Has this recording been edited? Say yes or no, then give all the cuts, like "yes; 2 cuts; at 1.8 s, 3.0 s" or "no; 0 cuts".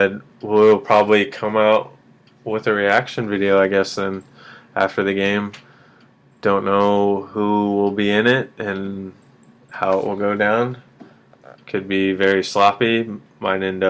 no; 0 cuts